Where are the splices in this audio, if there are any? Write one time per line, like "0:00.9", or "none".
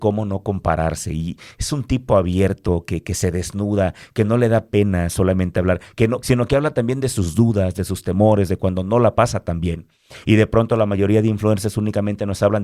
0:06.2